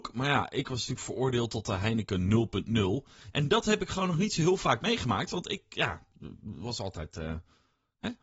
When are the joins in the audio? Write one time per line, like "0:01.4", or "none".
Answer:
0:03.3